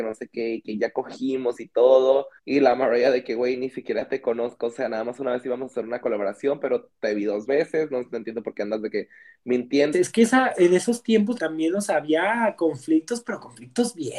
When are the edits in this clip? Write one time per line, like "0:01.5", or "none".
0:02.4
0:09.9
0:11.4